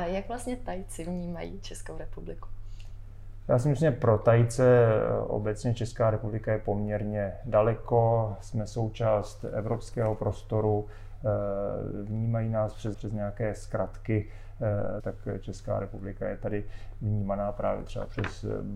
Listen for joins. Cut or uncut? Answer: cut